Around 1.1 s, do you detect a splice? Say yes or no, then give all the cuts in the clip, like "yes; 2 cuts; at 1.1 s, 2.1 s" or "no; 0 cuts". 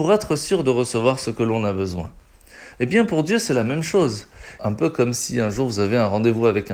no; 2 cuts; at 2.7 s, 4.6 s